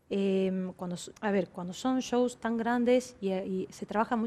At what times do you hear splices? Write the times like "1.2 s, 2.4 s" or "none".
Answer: 1.2 s